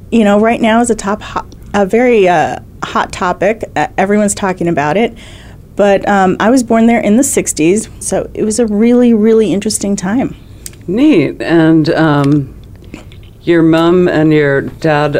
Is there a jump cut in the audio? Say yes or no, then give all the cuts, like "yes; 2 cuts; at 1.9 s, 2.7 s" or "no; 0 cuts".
yes; 1 cut; at 8.0 s